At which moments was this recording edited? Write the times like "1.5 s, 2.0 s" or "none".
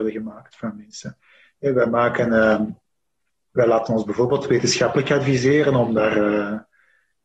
none